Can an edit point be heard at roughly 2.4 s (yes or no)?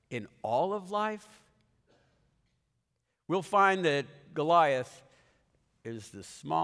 no